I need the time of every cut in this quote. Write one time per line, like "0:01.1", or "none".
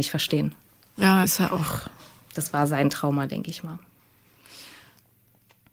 0:01.2